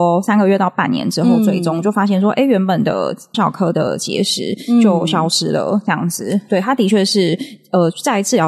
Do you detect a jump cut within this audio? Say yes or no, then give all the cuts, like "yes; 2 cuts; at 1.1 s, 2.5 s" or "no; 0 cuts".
yes; 1 cut; at 3.3 s